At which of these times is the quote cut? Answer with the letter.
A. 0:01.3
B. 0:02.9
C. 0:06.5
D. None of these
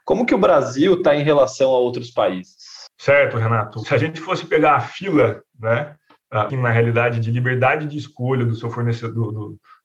C